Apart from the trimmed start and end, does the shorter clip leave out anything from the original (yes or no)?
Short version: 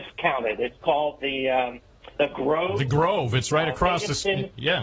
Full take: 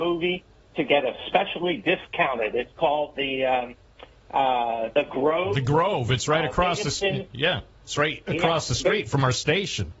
yes